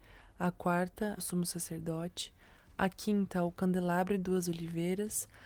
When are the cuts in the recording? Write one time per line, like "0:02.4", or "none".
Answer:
0:01.2